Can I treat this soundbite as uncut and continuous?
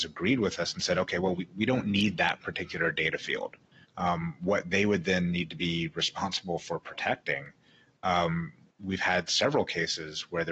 no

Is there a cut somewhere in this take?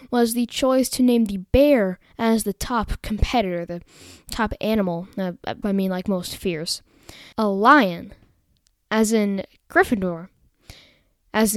yes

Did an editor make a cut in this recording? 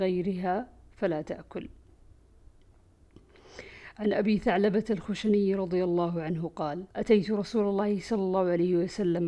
yes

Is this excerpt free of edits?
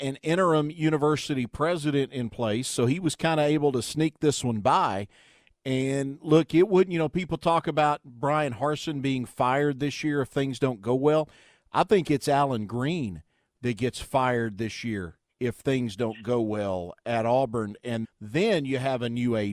no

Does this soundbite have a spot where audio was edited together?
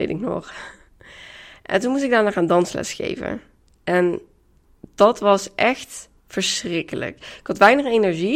yes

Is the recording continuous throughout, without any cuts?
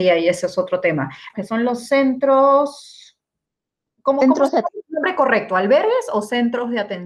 no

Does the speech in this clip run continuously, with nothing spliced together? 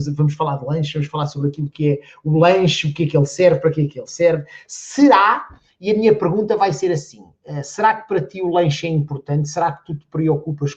yes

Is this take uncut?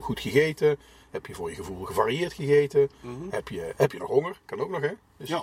yes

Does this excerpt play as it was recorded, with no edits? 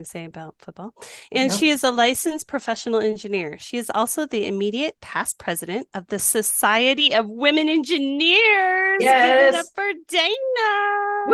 yes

